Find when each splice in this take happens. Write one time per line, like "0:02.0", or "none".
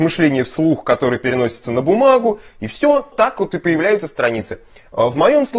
0:03.1

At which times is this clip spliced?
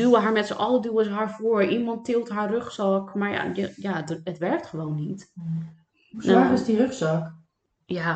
none

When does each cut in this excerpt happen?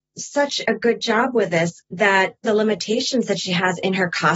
0:02.4

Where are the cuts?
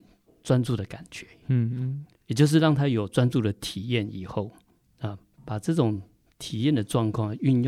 none

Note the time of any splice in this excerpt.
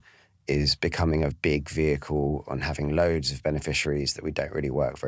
0:01.3

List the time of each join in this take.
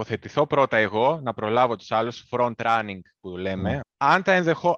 0:03.8

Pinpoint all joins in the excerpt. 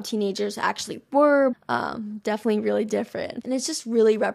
0:01.5
0:03.4

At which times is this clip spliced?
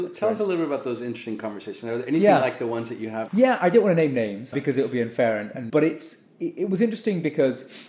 0:03.3
0:04.5
0:05.7

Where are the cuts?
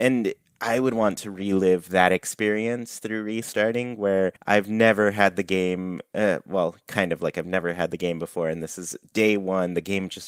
0:04.4

